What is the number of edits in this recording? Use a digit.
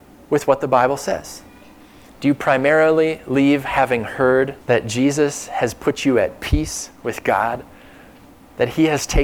2